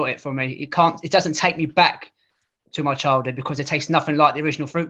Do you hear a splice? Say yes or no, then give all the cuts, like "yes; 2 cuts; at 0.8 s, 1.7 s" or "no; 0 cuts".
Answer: no; 0 cuts